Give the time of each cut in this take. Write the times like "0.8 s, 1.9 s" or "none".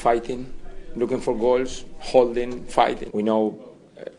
3.1 s